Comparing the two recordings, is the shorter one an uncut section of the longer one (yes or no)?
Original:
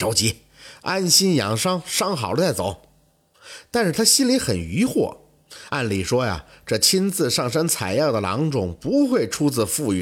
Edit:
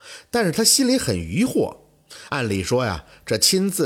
yes